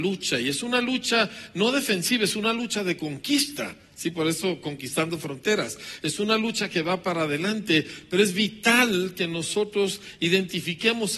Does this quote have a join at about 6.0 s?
no; 0 cuts

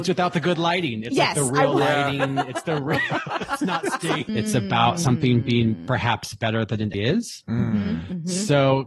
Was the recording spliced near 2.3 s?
no; 2 cuts; at 4.3 s, 6.9 s

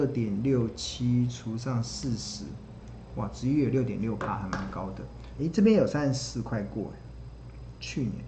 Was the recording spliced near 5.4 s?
yes; 1 cut; at 5.4 s

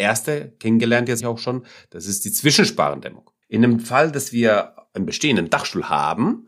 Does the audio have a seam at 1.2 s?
yes; 2 cuts; at 1.2 s, 3.4 s

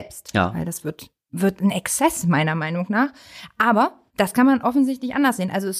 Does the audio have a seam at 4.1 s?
yes; 1 cut; at 4.1 s

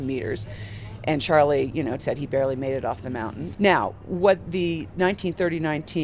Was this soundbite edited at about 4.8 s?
no; 2 cuts; at 2.0 s, 3.5 s

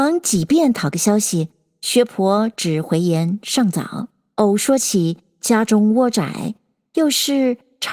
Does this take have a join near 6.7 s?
no; 1 cut; at 4.3 s

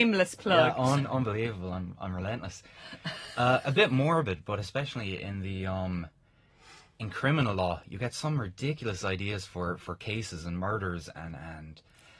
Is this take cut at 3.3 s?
no; 0 cuts

